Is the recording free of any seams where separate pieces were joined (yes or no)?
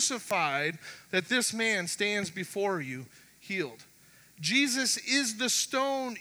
no